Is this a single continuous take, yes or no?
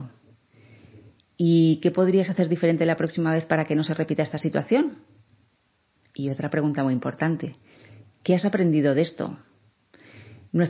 yes